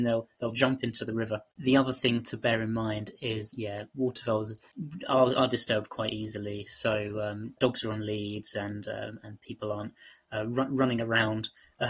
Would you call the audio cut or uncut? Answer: cut